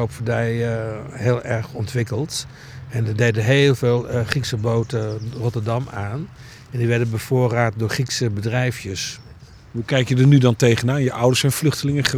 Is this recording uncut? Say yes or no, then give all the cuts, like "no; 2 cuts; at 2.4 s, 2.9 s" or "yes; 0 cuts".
yes; 0 cuts